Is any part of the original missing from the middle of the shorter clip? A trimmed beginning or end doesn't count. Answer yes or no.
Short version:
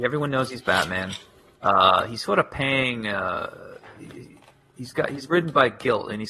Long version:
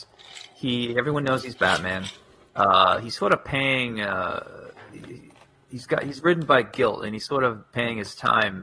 no